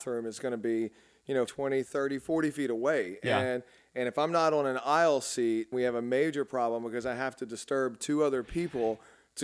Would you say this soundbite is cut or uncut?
cut